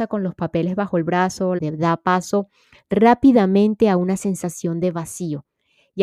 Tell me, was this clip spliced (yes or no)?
yes